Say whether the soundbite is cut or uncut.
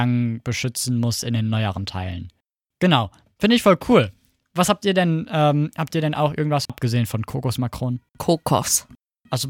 cut